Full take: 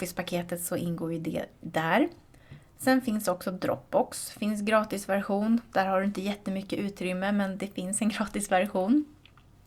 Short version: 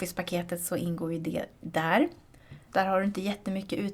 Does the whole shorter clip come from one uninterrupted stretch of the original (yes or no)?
no